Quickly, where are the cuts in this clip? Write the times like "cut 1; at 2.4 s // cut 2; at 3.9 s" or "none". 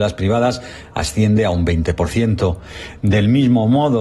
cut 1; at 3.0 s